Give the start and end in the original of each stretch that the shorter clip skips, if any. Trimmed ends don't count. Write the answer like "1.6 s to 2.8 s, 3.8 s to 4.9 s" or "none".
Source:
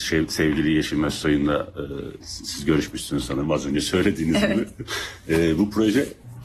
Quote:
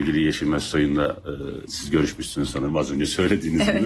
2.2 s to 2.4 s